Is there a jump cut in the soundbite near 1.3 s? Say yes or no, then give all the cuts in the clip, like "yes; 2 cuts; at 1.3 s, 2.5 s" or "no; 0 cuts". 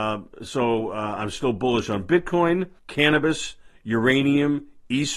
no; 1 cut; at 2.8 s